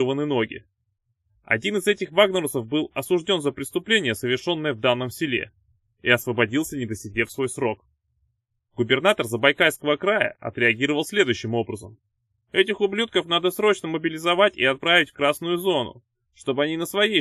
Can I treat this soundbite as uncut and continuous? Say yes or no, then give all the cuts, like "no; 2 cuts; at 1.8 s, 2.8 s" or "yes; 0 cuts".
no; 1 cut; at 1.3 s